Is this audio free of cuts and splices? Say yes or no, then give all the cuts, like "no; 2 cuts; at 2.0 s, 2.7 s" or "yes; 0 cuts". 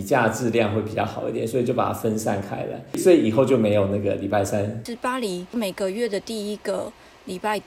yes; 0 cuts